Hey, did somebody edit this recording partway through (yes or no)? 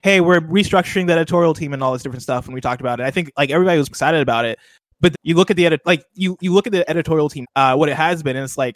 yes